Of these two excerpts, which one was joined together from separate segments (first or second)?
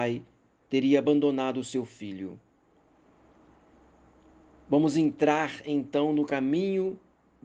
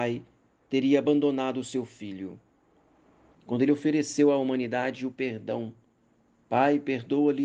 second